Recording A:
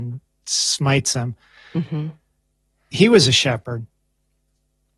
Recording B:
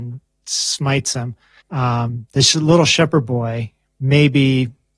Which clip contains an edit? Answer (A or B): B